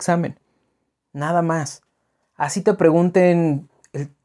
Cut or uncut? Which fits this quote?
uncut